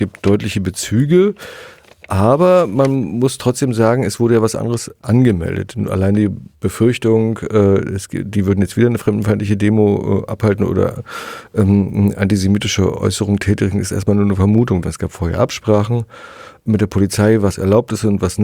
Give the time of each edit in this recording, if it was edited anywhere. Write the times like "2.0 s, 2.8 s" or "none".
14.8 s